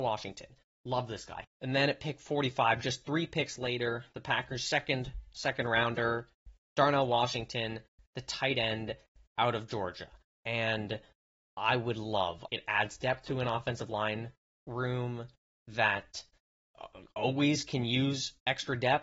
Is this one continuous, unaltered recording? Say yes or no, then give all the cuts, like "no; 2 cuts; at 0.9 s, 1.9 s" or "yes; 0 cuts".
no; 3 cuts; at 1.4 s, 10.4 s, 12.5 s